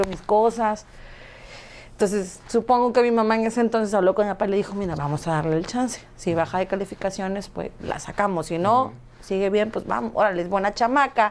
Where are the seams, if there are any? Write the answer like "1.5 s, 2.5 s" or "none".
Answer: 2.4 s